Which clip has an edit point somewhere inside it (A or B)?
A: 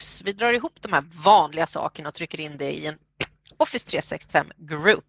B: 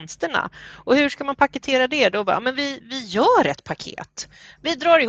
B